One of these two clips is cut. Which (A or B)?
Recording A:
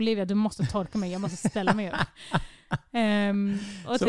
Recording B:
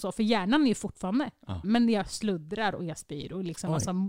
B